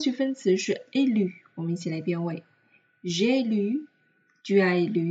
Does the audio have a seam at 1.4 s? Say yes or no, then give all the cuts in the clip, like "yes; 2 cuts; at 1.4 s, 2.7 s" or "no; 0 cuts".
no; 0 cuts